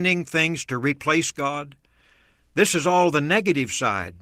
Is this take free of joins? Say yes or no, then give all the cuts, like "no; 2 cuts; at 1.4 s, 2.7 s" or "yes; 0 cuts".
yes; 0 cuts